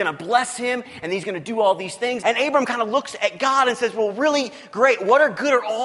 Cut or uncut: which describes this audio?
cut